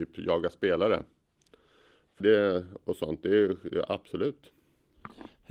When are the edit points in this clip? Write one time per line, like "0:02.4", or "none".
0:02.2